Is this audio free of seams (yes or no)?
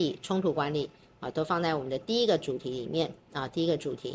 yes